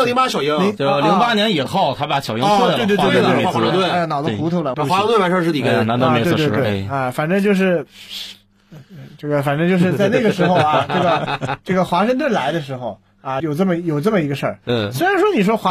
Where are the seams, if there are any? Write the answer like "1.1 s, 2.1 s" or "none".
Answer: 4.7 s, 13.4 s